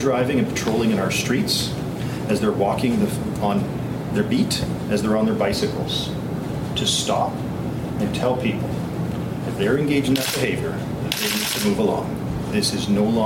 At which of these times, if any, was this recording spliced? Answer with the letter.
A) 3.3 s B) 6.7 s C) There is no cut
C